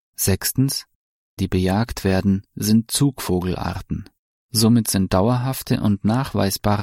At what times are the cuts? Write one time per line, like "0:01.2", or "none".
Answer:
0:01.4